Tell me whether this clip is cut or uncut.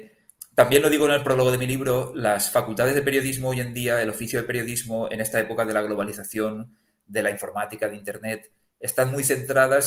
uncut